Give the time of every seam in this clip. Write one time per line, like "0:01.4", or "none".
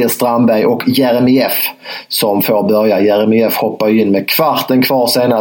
none